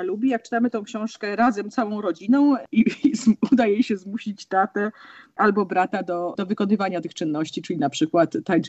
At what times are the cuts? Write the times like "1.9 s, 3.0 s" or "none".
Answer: none